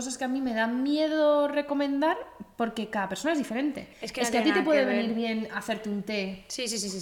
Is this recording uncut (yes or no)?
yes